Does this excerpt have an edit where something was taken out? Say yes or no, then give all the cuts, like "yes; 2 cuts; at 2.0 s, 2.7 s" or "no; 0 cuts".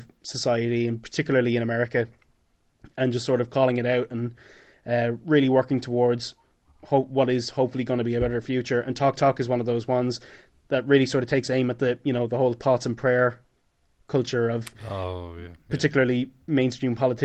no; 0 cuts